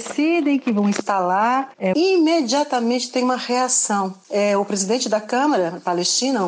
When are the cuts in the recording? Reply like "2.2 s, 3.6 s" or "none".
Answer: 1.9 s